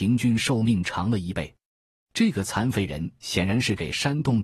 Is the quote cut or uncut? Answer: uncut